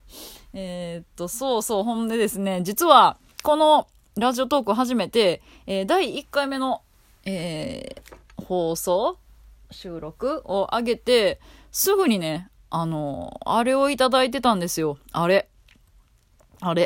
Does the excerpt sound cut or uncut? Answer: uncut